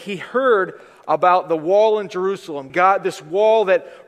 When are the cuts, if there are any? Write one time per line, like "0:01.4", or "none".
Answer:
0:02.7